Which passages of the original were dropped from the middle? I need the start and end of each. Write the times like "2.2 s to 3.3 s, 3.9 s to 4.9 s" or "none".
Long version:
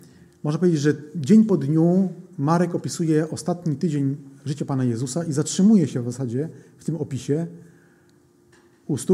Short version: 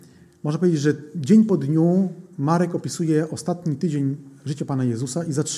none